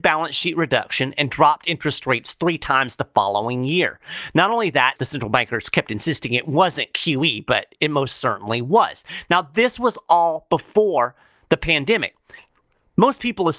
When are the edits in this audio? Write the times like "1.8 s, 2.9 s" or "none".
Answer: 5.0 s